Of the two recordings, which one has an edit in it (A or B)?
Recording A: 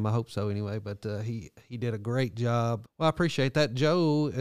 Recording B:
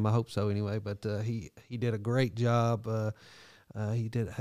A